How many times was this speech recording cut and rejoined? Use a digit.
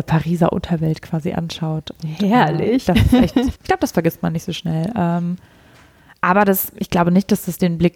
1